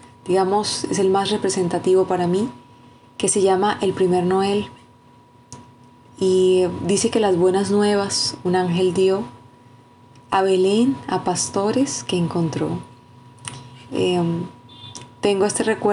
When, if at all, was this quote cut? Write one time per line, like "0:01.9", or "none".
0:13.9

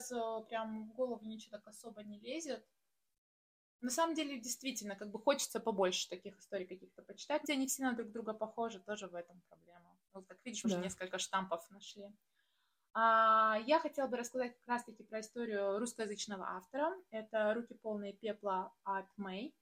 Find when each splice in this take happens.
0:07.4
0:10.6

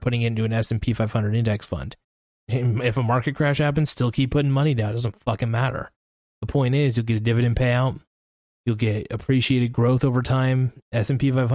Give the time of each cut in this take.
0:02.4

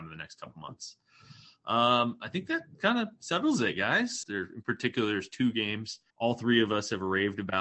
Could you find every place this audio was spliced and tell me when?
0:04.2
0:06.1

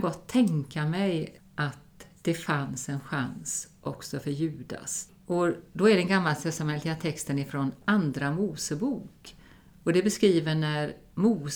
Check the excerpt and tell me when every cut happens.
0:01.4
0:05.1

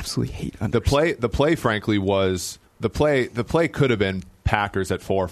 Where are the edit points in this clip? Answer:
0:02.7

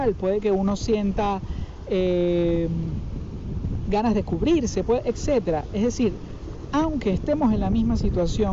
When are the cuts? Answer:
none

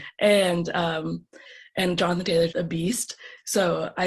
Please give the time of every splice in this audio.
0:02.5

